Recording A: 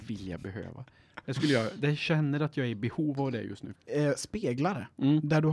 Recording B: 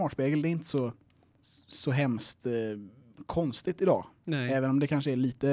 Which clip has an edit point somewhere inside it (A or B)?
A